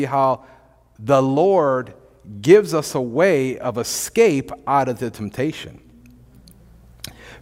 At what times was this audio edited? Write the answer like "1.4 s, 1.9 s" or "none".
none